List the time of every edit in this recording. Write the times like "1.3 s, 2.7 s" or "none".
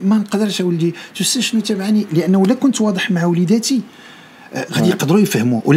4.7 s